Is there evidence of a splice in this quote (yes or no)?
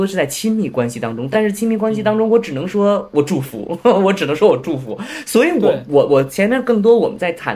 no